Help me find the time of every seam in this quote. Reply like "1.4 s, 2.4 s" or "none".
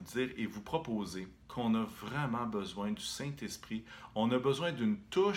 1.4 s